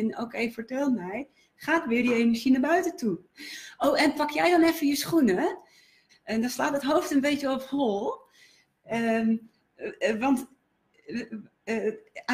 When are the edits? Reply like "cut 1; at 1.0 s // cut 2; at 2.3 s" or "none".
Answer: cut 1; at 3.2 s // cut 2; at 6.1 s